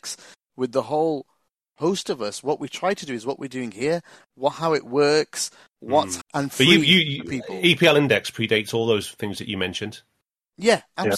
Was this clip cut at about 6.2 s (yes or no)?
yes